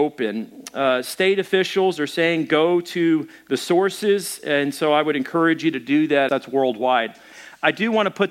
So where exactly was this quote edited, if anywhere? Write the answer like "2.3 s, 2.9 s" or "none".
6.3 s